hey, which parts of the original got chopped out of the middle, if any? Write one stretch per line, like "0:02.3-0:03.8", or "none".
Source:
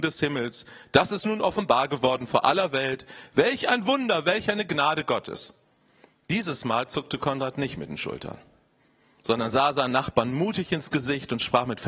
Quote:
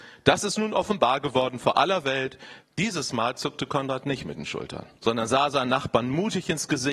0:03.3-0:06.1
0:08.5-0:09.2